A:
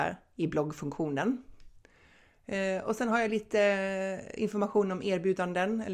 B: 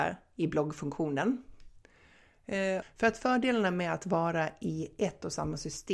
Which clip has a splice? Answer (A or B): B